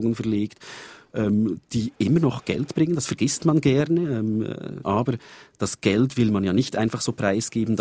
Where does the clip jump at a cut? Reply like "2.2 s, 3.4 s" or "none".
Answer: 4.8 s